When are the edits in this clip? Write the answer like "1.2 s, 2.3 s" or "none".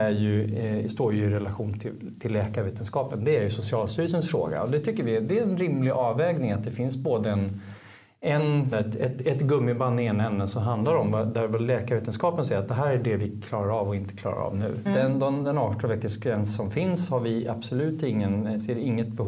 8.7 s, 14.9 s

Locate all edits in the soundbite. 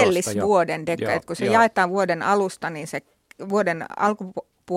none

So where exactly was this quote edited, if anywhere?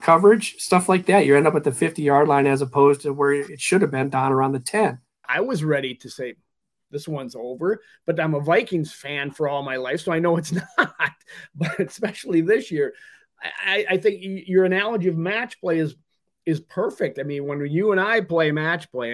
5.2 s

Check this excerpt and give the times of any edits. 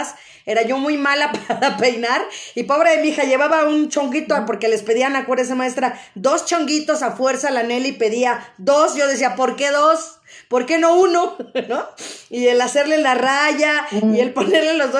none

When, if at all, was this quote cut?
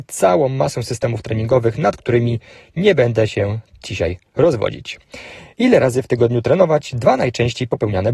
none

